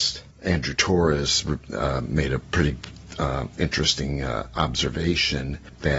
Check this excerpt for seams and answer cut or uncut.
uncut